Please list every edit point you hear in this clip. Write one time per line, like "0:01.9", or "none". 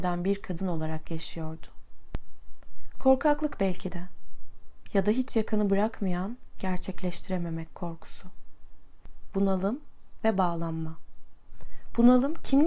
0:09.3